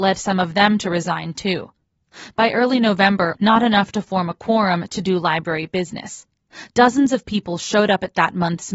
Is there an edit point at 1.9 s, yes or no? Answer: no